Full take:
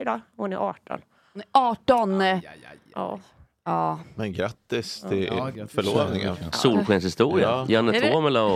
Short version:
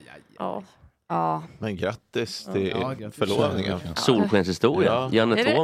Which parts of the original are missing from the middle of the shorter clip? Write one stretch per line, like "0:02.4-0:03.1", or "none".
none